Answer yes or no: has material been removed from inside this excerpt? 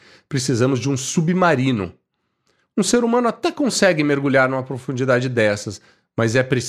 no